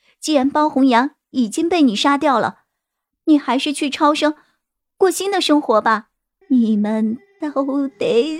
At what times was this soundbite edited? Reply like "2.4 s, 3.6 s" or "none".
6.4 s